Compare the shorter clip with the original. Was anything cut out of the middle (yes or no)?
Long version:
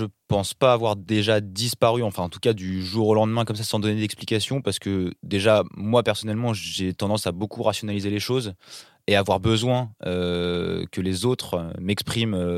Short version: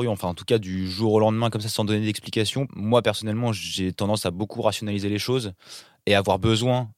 yes